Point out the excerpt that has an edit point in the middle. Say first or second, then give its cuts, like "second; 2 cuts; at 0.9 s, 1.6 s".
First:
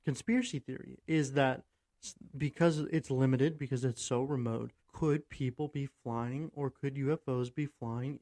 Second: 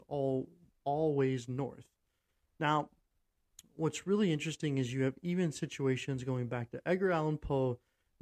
first; 2 cuts; at 3.6 s, 4.8 s